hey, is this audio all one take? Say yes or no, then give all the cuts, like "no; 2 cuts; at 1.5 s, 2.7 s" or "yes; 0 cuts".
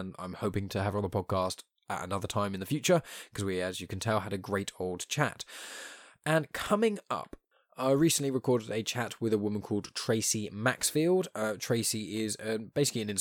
yes; 0 cuts